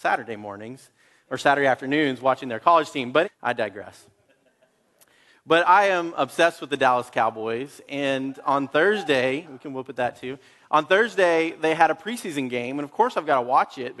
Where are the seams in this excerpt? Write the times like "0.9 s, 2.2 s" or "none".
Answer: 3.2 s, 9.4 s